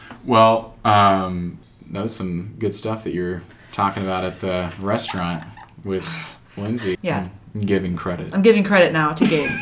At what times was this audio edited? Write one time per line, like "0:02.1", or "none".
0:06.9